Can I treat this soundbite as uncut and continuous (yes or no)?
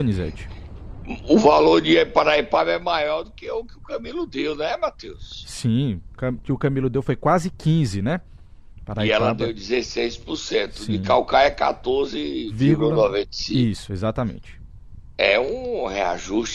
no